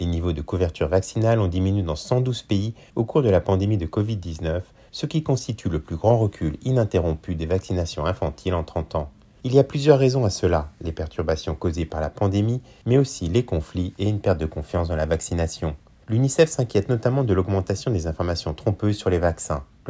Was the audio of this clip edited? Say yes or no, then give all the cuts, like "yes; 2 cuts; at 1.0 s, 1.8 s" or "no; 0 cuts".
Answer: no; 0 cuts